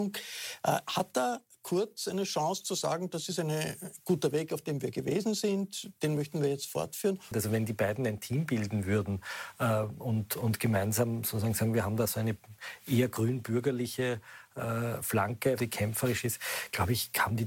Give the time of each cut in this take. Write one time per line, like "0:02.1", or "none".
0:07.3
0:15.6